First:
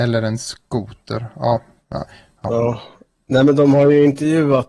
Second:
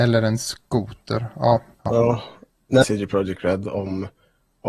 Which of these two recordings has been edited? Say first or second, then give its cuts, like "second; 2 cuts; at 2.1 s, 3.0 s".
second; 2 cuts; at 1.7 s, 2.8 s